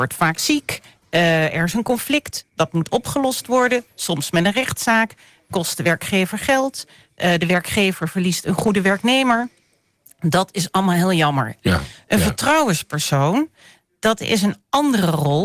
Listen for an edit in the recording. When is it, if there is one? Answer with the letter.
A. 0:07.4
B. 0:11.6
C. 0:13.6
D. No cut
B